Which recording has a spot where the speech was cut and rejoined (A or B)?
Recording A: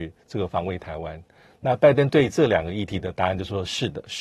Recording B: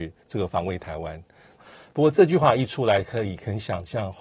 B